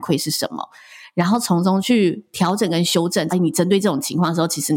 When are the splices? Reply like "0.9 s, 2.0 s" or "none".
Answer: 3.3 s